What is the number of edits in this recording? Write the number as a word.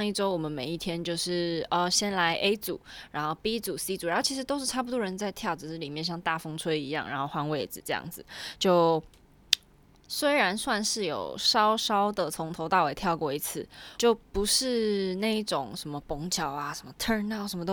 one